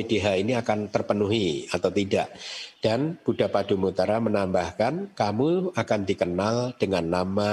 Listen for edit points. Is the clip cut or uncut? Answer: cut